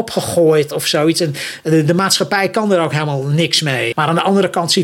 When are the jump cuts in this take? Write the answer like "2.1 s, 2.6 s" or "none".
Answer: 3.9 s